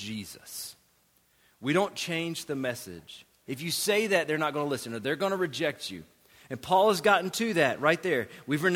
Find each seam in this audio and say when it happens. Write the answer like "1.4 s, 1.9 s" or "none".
3.5 s